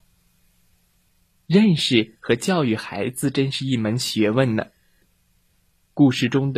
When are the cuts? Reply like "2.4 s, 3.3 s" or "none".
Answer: none